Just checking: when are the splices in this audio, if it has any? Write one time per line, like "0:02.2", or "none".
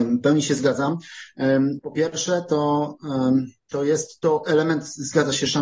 0:01.8